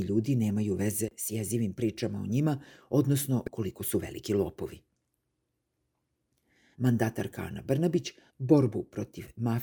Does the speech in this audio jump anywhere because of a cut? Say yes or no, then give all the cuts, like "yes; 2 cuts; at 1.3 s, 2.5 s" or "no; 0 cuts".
yes; 1 cut; at 6.7 s